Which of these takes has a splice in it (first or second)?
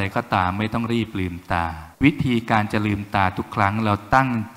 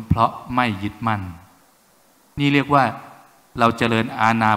first